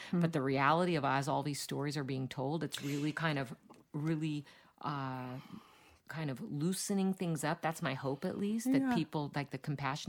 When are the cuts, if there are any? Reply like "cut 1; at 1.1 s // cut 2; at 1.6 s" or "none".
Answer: none